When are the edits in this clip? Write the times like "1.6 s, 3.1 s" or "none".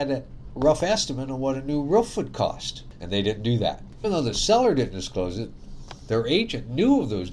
3.0 s, 4.0 s